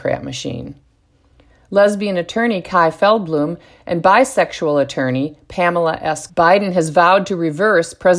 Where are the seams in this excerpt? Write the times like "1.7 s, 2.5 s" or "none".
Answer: 6.3 s